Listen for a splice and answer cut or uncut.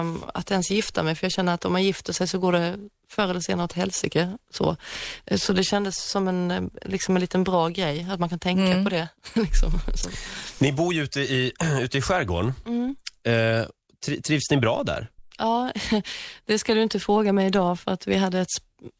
uncut